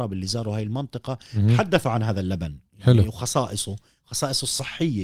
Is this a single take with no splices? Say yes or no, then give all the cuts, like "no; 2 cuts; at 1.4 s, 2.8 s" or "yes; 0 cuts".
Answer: yes; 0 cuts